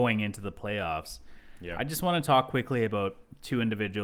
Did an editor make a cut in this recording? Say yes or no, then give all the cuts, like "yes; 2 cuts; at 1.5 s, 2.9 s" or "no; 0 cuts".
no; 0 cuts